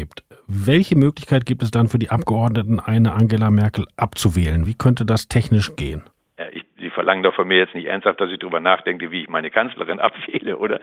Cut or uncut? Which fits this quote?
uncut